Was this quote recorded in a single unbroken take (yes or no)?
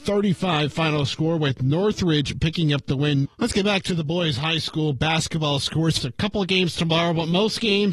no